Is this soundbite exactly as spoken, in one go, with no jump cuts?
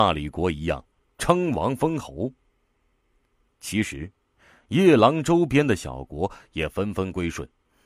yes; 0 cuts

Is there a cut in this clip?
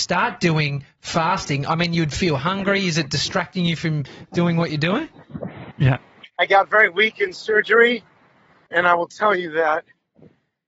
yes; 2 cuts; at 5.7 s, 8.7 s

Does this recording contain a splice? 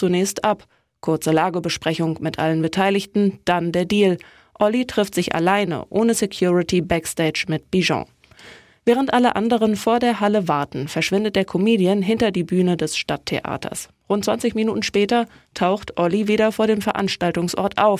no; 0 cuts

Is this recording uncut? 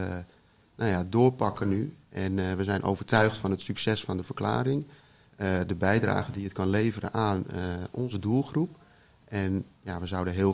yes; 0 cuts

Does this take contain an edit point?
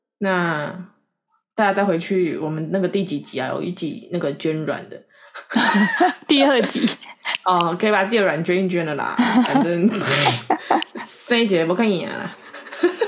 no; 0 cuts

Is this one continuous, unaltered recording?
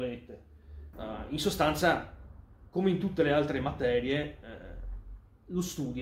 no; 1 cut; at 0.9 s

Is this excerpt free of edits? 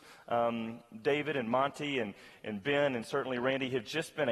yes; 0 cuts

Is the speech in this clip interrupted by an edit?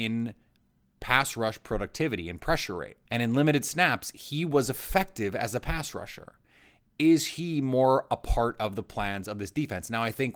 yes; 1 cut; at 3.0 s

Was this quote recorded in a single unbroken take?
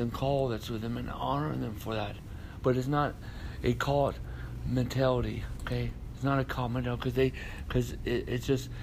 yes; 0 cuts

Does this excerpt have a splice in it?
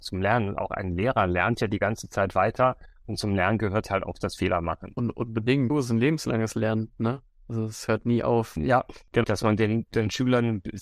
yes; 2 cuts; at 5.7 s, 9.2 s

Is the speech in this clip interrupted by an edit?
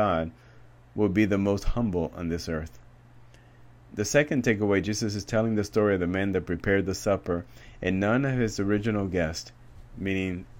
no; 0 cuts

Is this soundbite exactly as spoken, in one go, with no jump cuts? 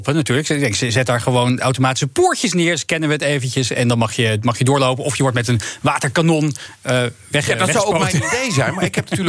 yes; 0 cuts

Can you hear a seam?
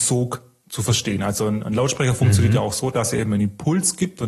no; 0 cuts

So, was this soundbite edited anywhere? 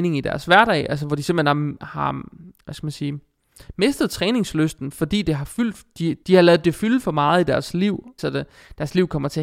yes; 2 cuts; at 6.2 s, 8.2 s

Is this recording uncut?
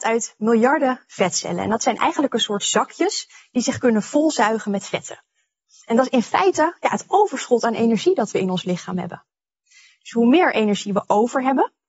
yes; 0 cuts

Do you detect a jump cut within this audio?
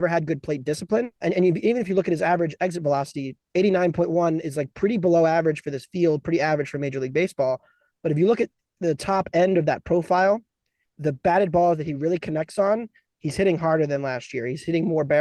yes; 1 cut; at 1.2 s

